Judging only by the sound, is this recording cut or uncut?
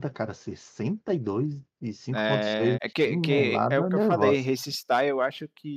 cut